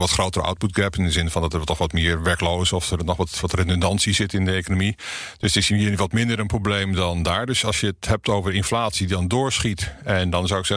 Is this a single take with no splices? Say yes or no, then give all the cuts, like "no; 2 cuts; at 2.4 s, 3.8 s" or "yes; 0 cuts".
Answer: yes; 0 cuts